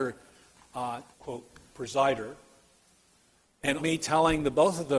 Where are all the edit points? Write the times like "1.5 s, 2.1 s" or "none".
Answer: 1.1 s, 3.8 s